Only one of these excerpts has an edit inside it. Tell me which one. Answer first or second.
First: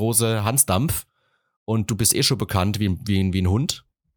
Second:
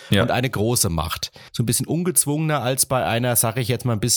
second